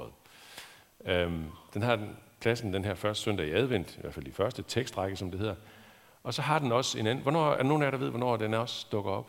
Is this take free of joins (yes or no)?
yes